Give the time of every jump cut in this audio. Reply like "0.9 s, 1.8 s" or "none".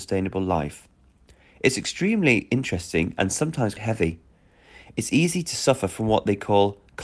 3.8 s